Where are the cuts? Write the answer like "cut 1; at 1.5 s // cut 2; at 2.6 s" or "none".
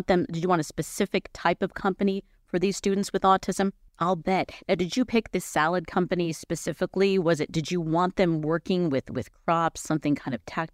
cut 1; at 3.9 s

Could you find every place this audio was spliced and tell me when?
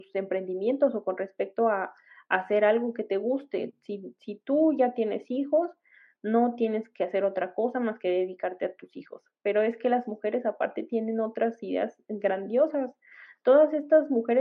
none

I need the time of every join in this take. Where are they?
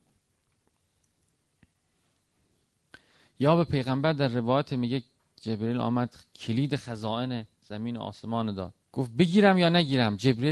cut 1; at 8.8 s

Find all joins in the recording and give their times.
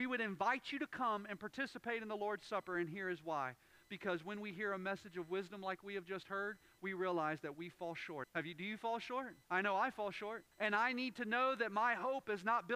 cut 1; at 8.2 s // cut 2; at 9.4 s // cut 3; at 10.5 s

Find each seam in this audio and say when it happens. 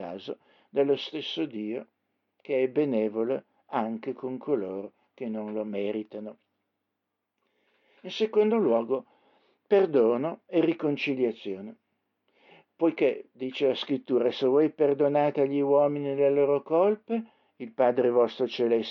none

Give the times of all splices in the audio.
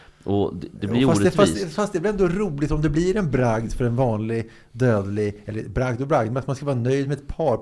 none

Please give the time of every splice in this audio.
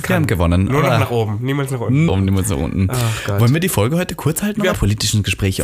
cut 1; at 2.1 s // cut 2; at 4.7 s

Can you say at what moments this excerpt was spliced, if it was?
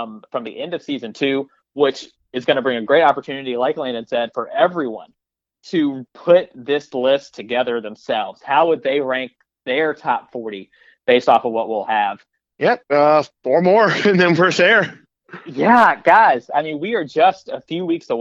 cut 1; at 12.5 s

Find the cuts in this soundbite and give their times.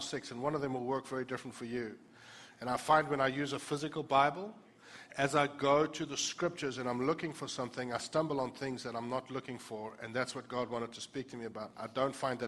none

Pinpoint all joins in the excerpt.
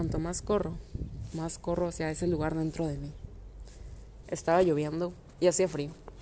cut 1; at 4.2 s

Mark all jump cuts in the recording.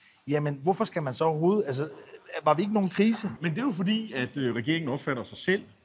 cut 1; at 3.4 s

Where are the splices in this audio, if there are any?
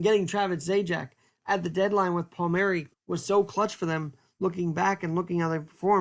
cut 1; at 2.9 s

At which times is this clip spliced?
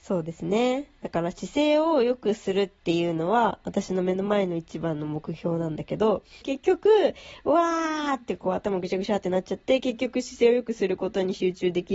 cut 1; at 6.4 s

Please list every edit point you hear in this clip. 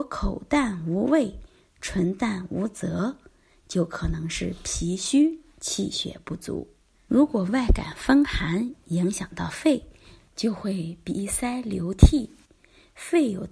cut 1; at 7.1 s

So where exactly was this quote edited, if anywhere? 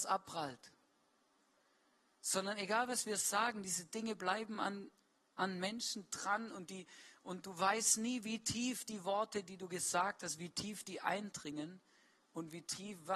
none

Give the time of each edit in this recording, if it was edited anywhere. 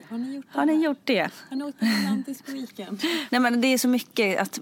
cut 1; at 3.3 s

